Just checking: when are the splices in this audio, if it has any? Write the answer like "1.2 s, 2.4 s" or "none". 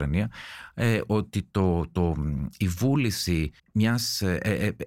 3.6 s